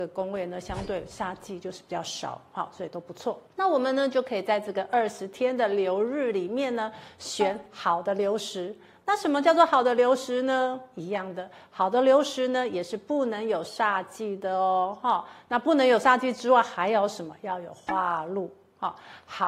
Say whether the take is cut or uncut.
uncut